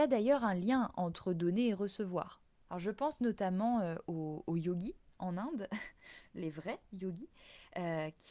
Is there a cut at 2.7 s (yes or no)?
yes